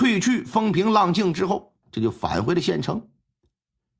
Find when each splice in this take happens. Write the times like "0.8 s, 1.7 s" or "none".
1.8 s